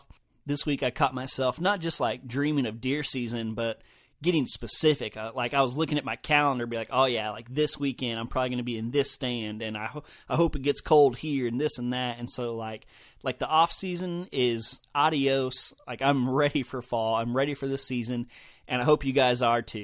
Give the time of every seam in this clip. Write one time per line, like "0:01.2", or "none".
none